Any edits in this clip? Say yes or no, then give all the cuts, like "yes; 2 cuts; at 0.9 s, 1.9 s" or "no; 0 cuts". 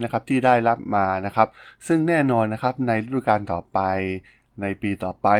no; 0 cuts